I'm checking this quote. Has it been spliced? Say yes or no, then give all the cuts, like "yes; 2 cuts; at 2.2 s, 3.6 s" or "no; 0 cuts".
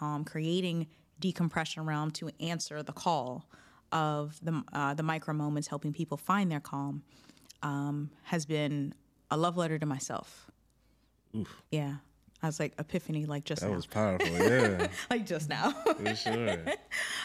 yes; 1 cut; at 11.7 s